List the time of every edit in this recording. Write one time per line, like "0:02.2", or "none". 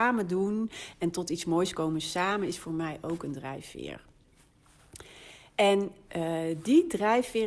none

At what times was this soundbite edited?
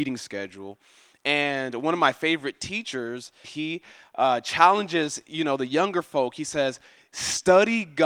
0:03.4

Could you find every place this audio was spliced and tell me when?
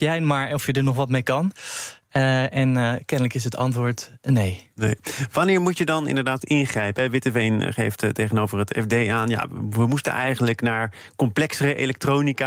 0:06.4

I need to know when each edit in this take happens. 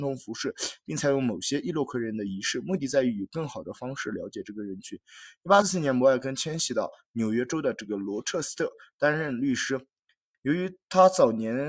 0:05.6
0:10.3

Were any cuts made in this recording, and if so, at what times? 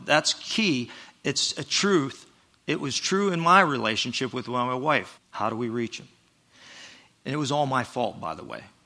0:05.2
0:07.1

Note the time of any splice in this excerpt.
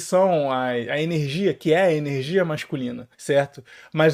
0:03.1

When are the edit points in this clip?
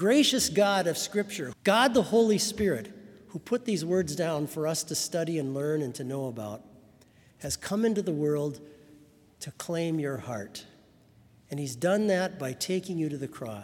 0:01.5

